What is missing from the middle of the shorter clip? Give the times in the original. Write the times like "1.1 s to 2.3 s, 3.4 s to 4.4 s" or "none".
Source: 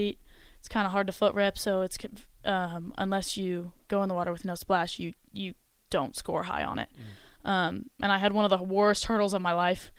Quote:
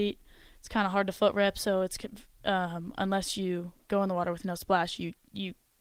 none

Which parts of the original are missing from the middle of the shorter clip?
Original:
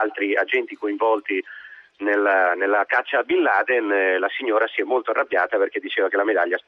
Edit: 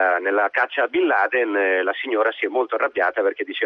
none

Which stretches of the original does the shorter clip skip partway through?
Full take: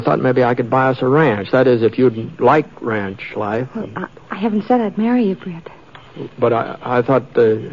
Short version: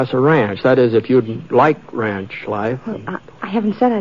none

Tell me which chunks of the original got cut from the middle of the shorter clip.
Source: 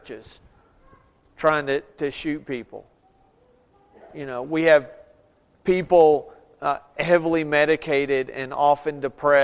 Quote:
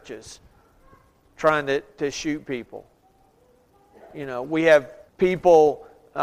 5.1 s to 5.5 s

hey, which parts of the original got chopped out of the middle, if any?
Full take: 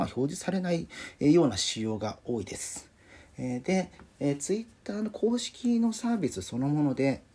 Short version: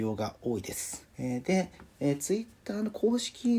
3.0 s to 3.3 s

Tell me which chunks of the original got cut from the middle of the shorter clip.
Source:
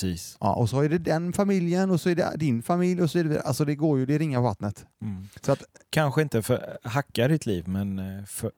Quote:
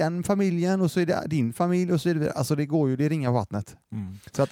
none

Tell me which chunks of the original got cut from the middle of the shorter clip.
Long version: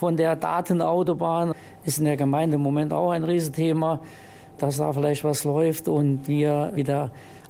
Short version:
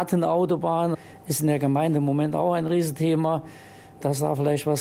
none

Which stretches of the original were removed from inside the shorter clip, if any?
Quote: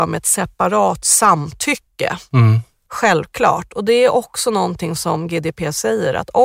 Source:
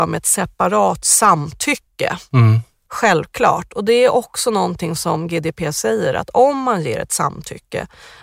none

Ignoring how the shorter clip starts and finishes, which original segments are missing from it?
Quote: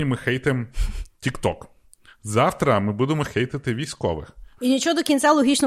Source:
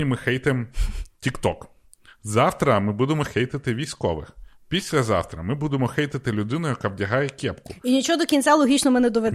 4.6 s to 7.8 s

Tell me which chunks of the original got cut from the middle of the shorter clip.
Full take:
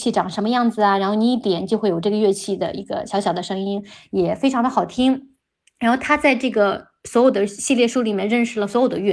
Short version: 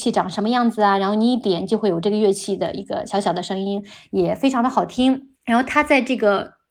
5.4 s to 5.7 s

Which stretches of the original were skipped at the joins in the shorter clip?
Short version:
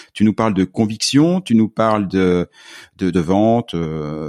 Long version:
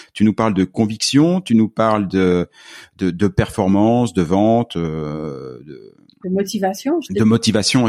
3.1 s to 4.1 s

